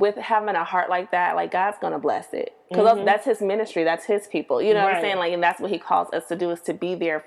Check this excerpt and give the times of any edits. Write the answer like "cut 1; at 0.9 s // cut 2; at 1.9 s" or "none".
none